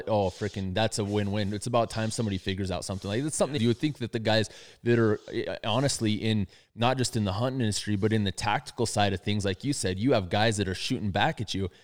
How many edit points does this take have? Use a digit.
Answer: 1